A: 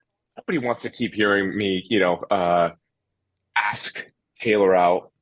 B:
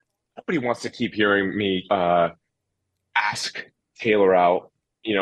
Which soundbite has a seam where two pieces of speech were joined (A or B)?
B